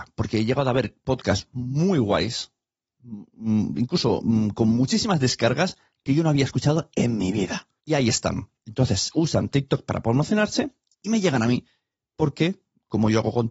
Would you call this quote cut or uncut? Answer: cut